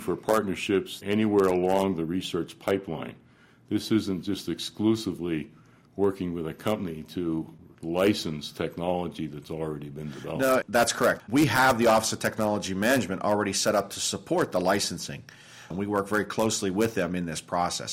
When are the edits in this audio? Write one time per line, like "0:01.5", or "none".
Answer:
0:11.2
0:15.7